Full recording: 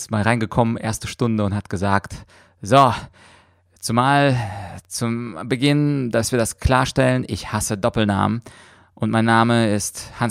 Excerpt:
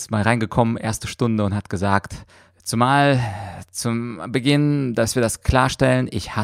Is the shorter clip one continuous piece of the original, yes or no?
no